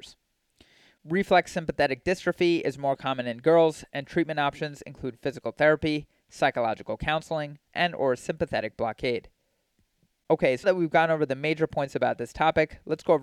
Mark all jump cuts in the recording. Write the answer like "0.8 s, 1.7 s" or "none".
7.7 s, 10.6 s